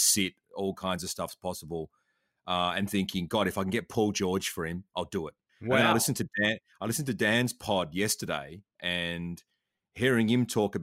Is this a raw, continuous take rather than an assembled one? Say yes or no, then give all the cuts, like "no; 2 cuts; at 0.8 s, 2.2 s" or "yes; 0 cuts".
no; 1 cut; at 5.5 s